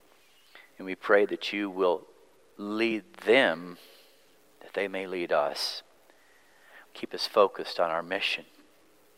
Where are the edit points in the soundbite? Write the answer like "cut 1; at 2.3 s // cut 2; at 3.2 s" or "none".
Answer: cut 1; at 6.9 s